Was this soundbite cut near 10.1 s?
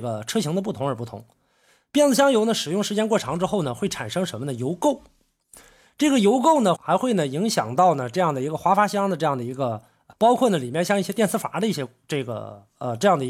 yes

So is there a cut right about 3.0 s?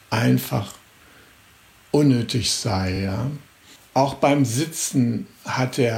no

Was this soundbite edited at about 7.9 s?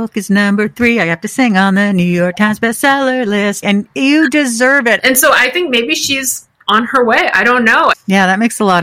yes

